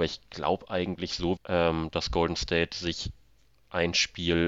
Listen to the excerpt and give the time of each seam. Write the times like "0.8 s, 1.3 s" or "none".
1.4 s